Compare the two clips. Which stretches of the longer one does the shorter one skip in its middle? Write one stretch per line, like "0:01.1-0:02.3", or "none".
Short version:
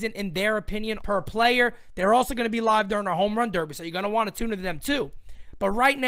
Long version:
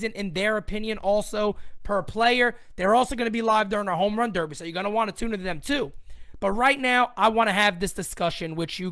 0:01.0-0:01.8